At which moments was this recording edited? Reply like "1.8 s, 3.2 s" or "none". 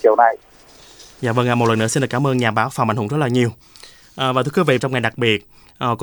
4.8 s